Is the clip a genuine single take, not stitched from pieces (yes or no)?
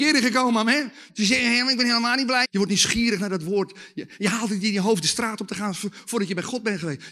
no